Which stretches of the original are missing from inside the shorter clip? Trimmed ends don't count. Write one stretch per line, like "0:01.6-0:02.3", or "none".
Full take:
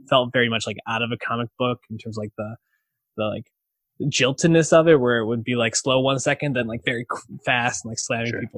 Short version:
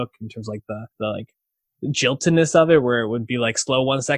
0:02.6-0:03.1